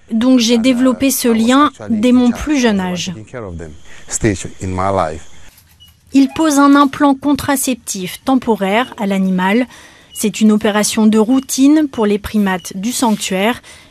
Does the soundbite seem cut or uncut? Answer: uncut